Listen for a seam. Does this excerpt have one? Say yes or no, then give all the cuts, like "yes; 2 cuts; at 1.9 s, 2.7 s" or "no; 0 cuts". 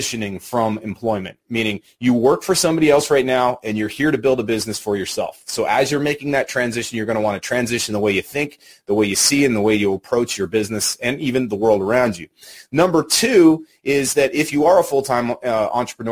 no; 0 cuts